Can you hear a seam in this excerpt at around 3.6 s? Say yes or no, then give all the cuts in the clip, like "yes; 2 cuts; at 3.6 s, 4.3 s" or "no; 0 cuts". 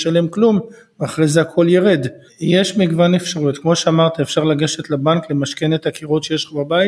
no; 1 cut; at 2.3 s